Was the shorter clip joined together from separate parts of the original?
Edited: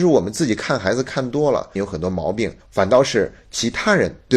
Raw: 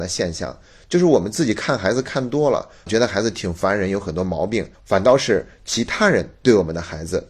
yes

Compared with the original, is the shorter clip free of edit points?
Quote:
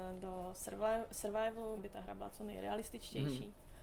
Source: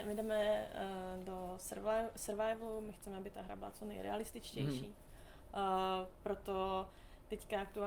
no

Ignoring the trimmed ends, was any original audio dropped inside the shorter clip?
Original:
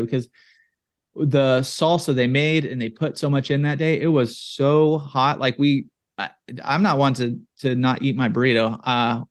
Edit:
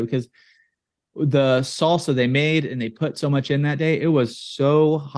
no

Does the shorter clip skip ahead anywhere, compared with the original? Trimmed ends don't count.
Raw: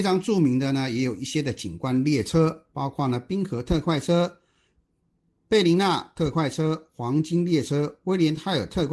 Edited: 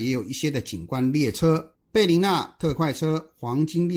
yes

